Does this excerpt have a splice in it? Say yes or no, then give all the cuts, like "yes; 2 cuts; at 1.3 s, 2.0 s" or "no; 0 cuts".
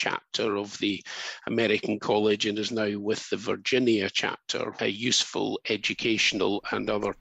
yes; 1 cut; at 4.8 s